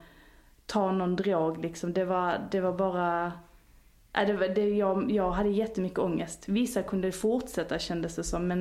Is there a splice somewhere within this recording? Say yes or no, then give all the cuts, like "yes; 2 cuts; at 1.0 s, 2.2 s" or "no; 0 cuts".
no; 0 cuts